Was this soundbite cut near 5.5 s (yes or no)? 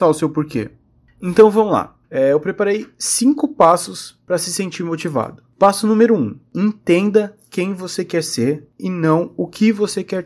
no